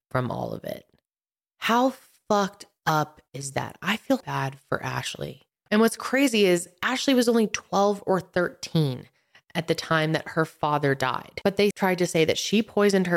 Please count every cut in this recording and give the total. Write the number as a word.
three